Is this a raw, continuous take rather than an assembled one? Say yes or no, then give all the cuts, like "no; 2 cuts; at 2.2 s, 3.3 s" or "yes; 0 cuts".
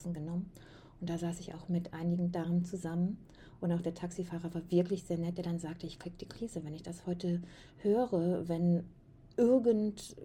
yes; 0 cuts